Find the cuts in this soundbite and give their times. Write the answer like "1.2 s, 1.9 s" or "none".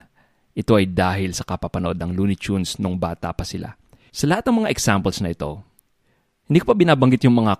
4.1 s